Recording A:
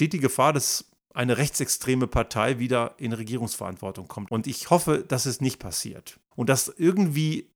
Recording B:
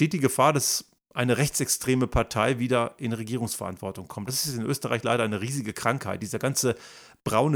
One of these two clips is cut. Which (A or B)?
A